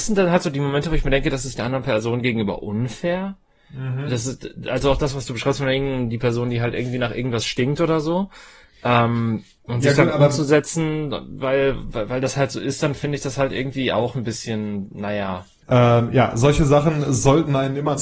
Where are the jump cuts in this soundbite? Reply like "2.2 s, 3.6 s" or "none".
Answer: 15.6 s